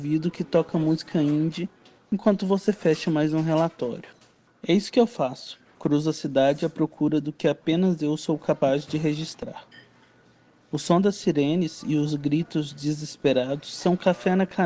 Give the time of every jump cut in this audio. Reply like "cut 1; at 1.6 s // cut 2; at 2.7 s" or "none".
cut 1; at 4.5 s